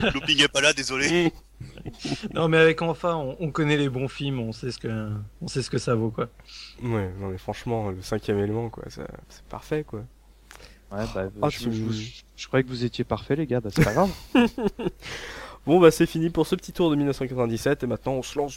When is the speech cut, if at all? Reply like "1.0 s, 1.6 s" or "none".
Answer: 9.2 s